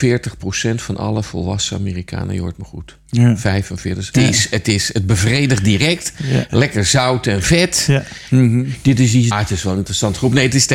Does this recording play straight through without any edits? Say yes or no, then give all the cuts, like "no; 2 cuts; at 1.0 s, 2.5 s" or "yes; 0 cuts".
no; 3 cuts; at 4.1 s, 8.3 s, 9.3 s